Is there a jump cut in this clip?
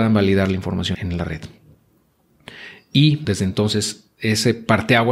yes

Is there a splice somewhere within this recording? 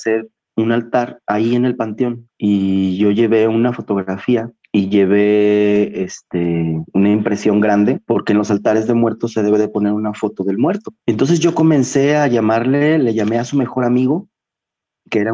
yes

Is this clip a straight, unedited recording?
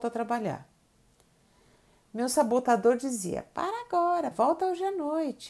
no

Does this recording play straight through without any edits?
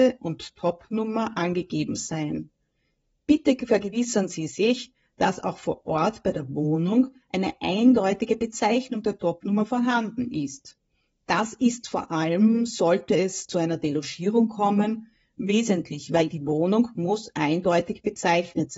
yes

